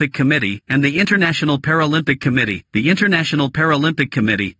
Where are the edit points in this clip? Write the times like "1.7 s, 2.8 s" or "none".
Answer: 2.7 s